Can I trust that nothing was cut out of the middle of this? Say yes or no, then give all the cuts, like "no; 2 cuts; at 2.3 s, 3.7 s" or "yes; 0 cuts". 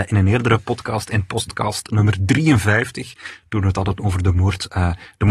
yes; 0 cuts